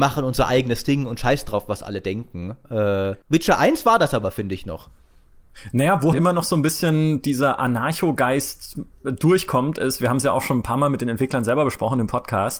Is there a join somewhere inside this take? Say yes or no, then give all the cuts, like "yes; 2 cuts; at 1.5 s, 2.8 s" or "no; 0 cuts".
yes; 2 cuts; at 3.2 s, 6.1 s